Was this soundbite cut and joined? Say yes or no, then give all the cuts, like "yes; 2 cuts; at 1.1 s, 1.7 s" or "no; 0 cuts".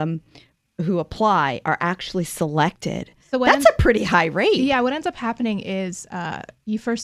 no; 0 cuts